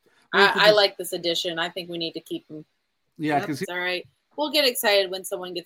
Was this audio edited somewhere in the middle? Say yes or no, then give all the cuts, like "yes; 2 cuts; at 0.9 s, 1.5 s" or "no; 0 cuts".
yes; 1 cut; at 3.6 s